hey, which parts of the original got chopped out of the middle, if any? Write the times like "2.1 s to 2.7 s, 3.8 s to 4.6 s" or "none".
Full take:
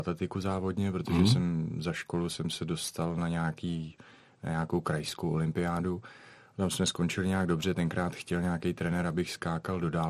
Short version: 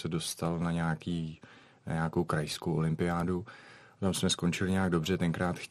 none